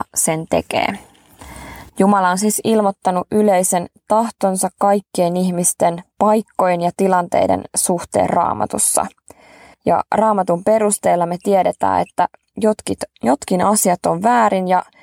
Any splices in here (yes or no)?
yes